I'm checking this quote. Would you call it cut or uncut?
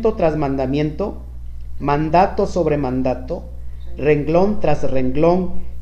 uncut